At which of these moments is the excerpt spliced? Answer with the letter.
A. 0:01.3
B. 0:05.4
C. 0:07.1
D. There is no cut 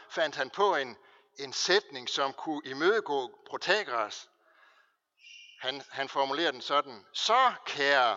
D